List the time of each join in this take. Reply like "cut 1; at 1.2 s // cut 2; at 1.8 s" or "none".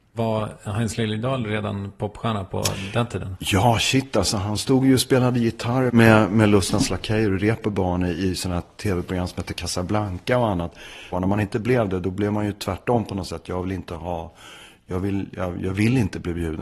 cut 1; at 5.9 s // cut 2; at 11.1 s